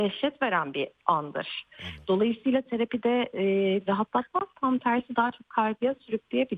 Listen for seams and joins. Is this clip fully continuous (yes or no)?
no